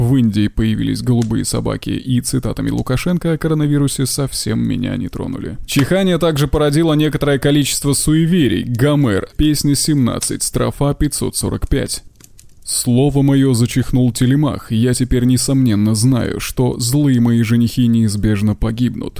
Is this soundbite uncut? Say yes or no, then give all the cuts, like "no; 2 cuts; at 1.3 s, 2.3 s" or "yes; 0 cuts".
no; 2 cuts; at 5.7 s, 9.3 s